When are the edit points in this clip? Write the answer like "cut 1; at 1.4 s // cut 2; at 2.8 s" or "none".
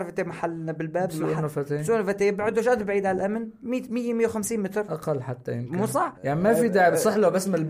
cut 1; at 6.2 s